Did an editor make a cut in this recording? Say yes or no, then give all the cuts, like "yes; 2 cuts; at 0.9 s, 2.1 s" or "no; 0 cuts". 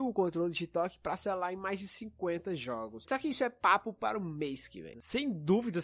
yes; 2 cuts; at 3.0 s, 4.9 s